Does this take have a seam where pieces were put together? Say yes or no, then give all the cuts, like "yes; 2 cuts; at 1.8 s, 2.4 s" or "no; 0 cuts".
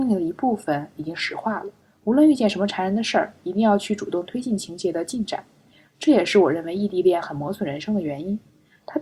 no; 0 cuts